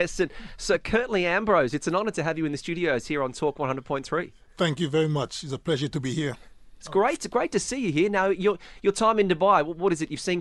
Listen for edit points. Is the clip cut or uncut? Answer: uncut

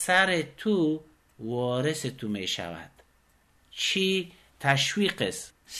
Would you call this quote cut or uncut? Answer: uncut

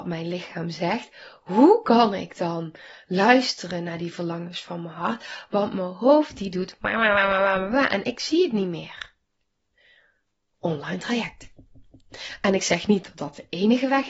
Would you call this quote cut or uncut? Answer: uncut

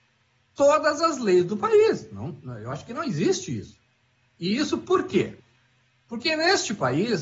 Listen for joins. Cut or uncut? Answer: uncut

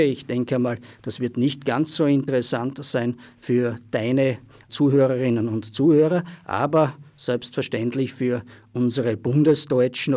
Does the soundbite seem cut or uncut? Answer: uncut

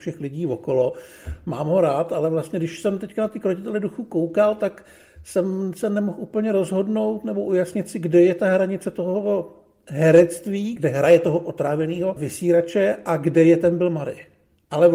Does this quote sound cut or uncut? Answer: cut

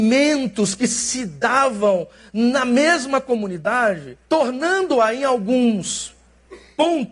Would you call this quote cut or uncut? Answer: cut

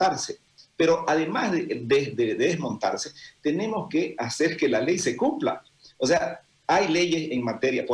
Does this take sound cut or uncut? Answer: uncut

